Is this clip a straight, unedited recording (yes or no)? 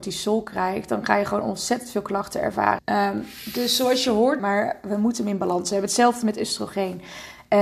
no